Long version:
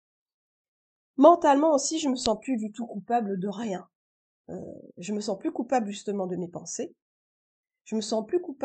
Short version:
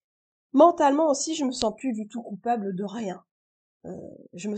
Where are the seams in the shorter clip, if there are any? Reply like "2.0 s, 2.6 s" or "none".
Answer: none